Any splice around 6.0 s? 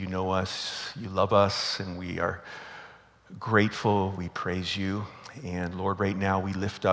no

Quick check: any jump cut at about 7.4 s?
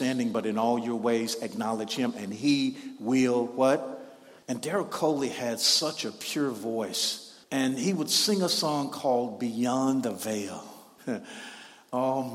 no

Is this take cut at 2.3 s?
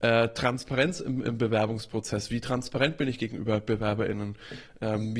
no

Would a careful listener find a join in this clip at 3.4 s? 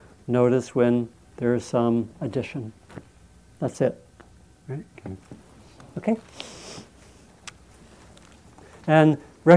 no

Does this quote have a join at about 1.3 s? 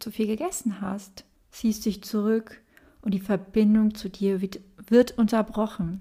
yes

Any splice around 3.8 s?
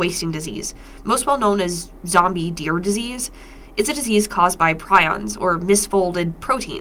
no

